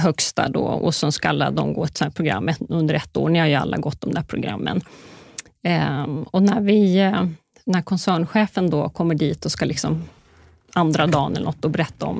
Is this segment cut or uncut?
uncut